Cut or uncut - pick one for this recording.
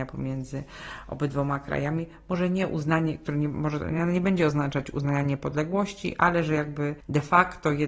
uncut